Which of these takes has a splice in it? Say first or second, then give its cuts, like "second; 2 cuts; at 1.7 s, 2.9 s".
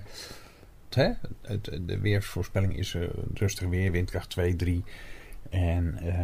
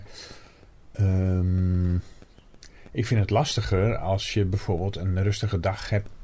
first; 1 cut; at 0.9 s